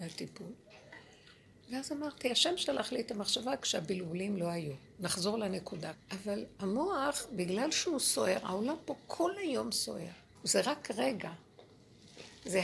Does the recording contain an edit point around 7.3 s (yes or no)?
no